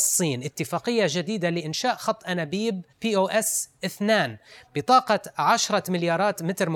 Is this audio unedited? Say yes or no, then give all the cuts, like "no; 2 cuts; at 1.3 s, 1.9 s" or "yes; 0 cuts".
no; 1 cut; at 2.9 s